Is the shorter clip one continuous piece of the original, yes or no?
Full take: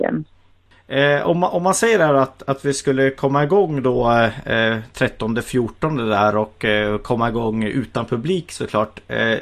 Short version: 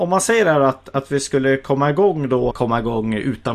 no